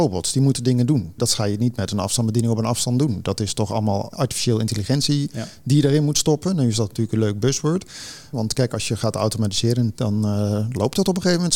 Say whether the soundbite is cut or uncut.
cut